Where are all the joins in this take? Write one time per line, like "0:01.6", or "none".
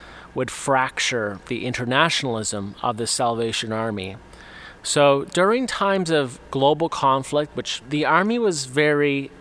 0:07.8